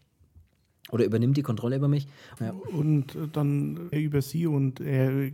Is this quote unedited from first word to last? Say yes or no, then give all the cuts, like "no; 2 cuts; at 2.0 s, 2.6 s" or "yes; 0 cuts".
no; 2 cuts; at 2.4 s, 3.9 s